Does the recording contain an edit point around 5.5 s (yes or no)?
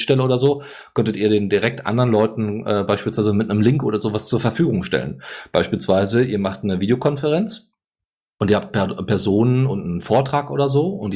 no